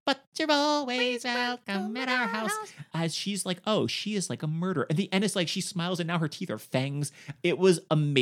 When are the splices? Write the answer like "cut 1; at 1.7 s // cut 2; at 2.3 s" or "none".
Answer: none